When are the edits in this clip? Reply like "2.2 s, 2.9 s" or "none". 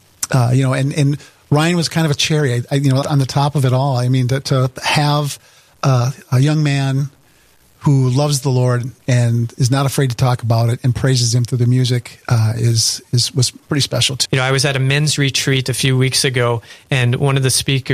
3.0 s, 14.2 s